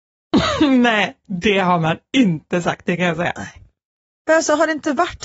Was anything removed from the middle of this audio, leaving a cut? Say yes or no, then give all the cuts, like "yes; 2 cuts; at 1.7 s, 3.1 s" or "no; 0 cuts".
no; 0 cuts